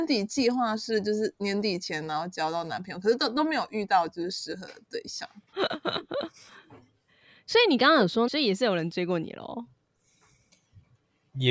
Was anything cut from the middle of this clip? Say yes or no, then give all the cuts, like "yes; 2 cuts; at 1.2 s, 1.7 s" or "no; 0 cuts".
yes; 2 cuts; at 5.5 s, 8.3 s